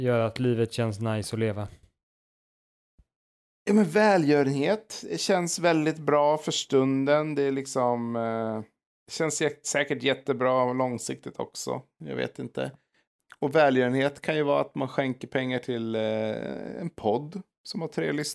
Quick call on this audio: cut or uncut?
uncut